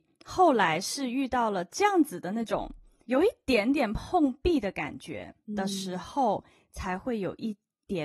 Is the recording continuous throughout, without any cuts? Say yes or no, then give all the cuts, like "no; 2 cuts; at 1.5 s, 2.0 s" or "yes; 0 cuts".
no; 1 cut; at 5.4 s